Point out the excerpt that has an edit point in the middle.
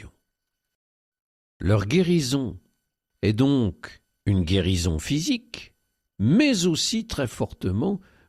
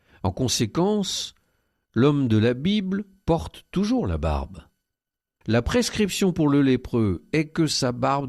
second; 1 cut; at 5.4 s

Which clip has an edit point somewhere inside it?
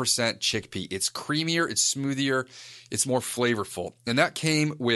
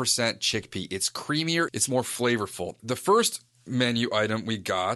second; 2 cuts; at 1.7 s, 2.8 s

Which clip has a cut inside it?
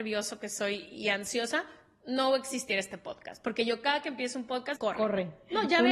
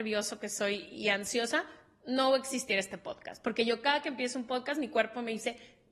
first; 1 cut; at 4.8 s

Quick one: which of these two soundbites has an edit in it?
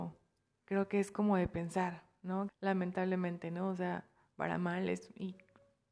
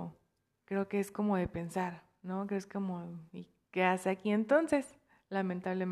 first; 1 cut; at 2.5 s

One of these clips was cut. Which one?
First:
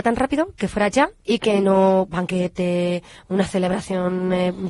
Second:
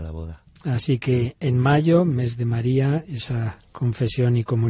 first; 1 cut; at 2.1 s

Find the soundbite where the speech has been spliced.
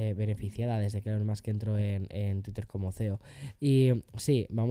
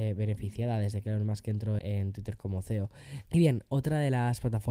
second; 2 cuts; at 1.8 s, 3.3 s

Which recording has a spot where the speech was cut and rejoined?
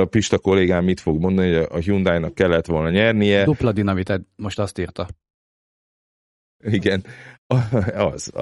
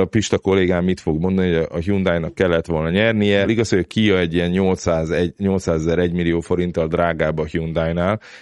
second; 1 cut; at 3.4 s

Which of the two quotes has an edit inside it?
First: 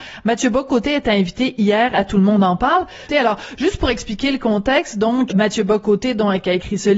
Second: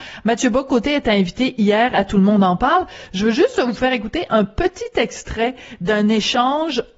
first; 2 cuts; at 3.1 s, 5.3 s

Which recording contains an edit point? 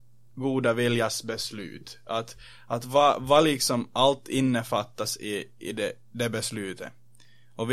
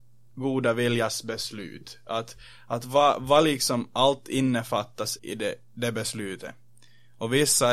second; 1 cut; at 5.2 s

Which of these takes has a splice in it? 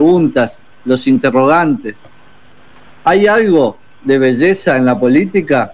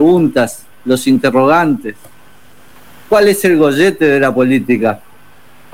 first; 1 cut; at 2.9 s

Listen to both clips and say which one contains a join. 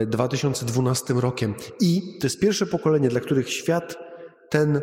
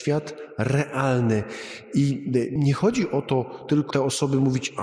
second; 2 cuts; at 2.6 s, 3.9 s

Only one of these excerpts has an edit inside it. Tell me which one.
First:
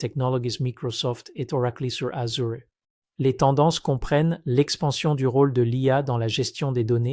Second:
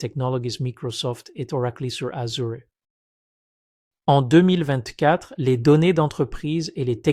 first; 1 cut; at 3.0 s

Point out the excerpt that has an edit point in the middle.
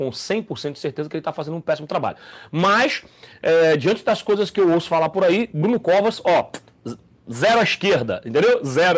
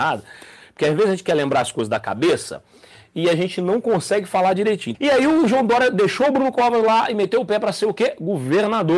second; 1 cut; at 4.9 s

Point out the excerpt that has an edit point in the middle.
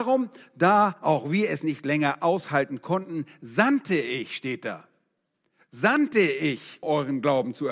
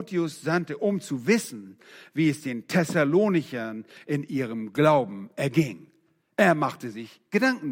first; 1 cut; at 6.8 s

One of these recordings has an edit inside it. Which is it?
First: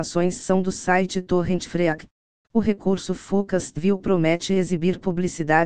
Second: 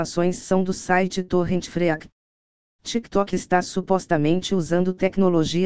first; 2 cuts; at 2.4 s, 4.0 s

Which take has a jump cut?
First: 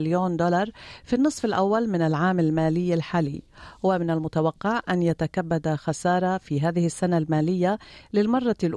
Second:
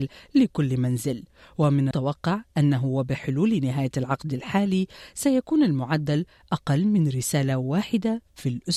second; 1 cut; at 1.9 s

